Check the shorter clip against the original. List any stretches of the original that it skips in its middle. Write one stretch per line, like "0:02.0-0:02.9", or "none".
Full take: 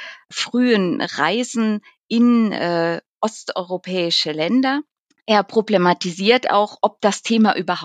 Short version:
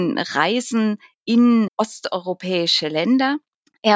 0:02.5-0:03.1